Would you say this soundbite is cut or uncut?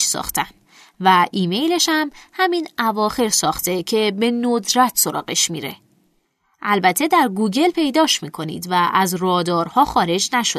uncut